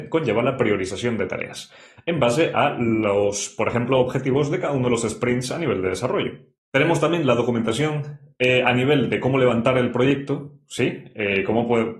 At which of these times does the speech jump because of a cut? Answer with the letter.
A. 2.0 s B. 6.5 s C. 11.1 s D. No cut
D